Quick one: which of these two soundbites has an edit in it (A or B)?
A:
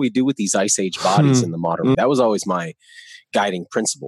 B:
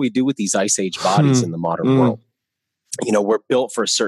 A